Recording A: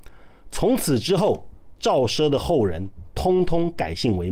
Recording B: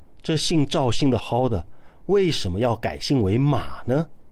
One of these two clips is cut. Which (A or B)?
B